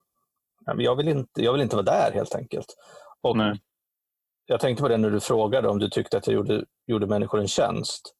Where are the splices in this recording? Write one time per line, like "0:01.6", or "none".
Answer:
none